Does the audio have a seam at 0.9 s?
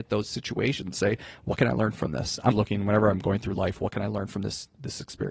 no; 1 cut; at 2.5 s

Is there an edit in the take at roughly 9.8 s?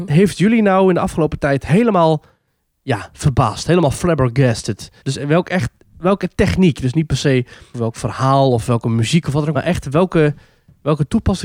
no; 1 cut; at 5.0 s

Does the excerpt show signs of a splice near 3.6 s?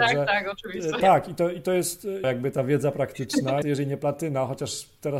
yes; 3 cuts; at 1.0 s, 2.2 s, 3.6 s

